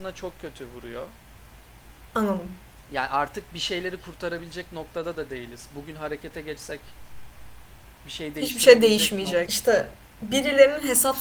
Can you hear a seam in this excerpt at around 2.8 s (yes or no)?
no